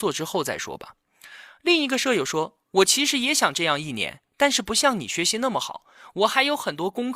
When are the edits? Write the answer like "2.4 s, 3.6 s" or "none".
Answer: none

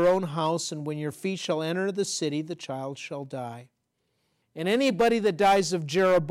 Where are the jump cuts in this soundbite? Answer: 4.4 s

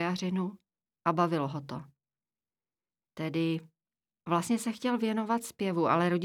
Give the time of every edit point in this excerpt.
none

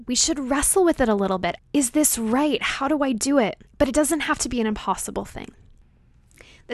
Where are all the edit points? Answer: 1.6 s, 3.7 s

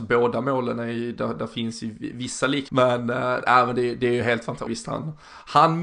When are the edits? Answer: 2.7 s, 4.7 s

